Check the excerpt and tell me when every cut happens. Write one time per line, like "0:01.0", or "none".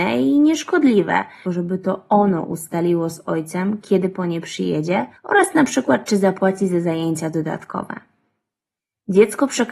0:01.5
0:05.2